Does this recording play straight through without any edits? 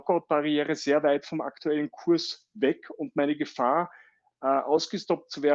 yes; 0 cuts

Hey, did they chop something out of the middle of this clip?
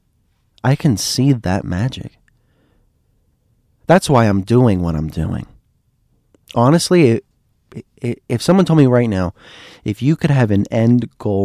no; 0 cuts

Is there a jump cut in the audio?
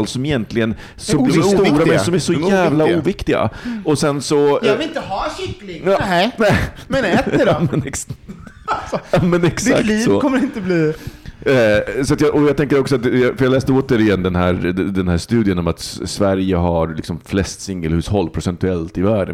no; 0 cuts

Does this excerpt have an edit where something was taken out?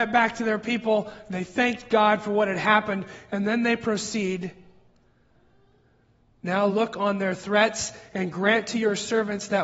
yes; 1 cut; at 6.7 s

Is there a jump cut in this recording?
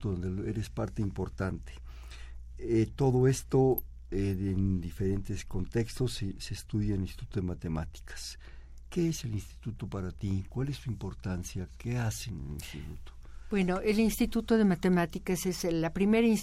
yes; 1 cut; at 10.5 s

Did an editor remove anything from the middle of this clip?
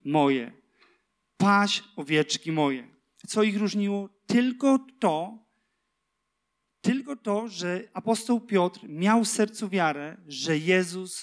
no; 0 cuts

